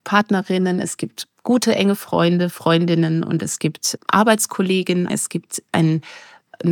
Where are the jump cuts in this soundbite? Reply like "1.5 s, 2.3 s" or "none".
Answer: 4.0 s, 5.1 s